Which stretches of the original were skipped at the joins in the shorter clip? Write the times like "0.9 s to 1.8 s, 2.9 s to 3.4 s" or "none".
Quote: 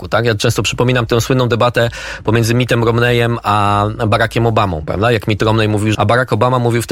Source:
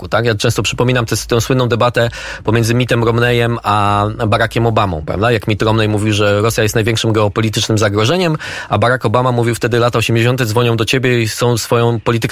1.1 s to 1.3 s, 6.1 s to 8.7 s